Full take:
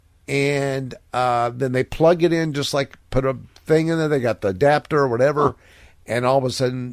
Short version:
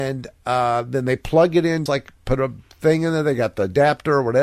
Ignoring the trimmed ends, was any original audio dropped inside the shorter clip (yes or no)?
yes